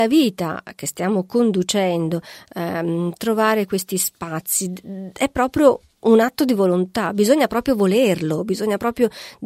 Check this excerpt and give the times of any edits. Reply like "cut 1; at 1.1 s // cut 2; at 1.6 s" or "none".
none